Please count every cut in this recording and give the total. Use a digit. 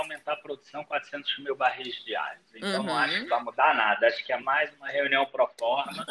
1